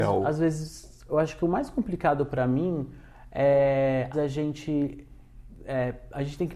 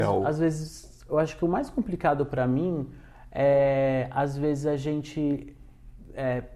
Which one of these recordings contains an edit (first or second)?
first